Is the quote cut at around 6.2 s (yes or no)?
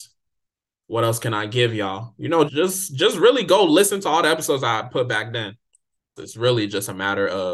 yes